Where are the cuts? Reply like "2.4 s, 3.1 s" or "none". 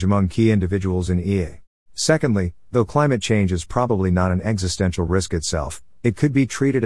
1.8 s